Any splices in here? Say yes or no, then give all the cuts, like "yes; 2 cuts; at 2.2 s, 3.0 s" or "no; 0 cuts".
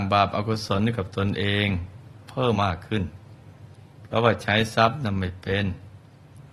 yes; 1 cut; at 2.5 s